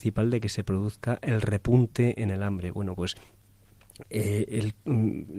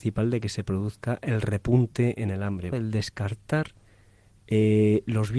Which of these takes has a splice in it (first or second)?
second